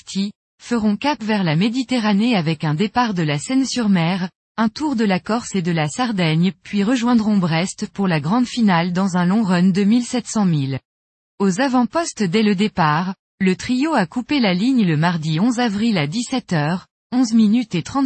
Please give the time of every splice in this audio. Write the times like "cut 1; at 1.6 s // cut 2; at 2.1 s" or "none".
cut 1; at 11.3 s